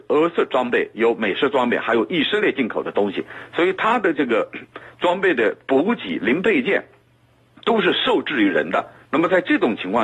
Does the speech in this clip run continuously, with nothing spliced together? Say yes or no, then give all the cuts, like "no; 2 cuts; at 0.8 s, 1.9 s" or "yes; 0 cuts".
yes; 0 cuts